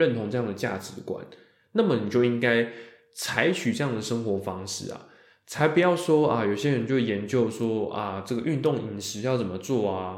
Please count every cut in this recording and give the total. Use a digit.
0